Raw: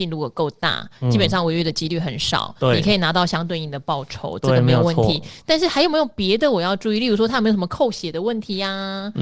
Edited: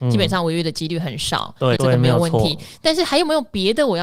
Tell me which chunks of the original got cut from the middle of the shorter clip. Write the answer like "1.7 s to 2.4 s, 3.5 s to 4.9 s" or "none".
2.8 s to 4.4 s